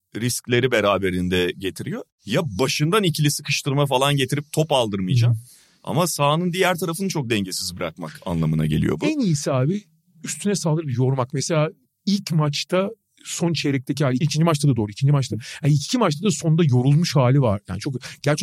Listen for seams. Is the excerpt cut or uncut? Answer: cut